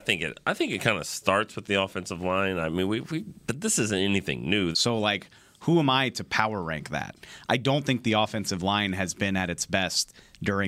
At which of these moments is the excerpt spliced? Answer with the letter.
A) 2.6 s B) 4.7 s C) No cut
B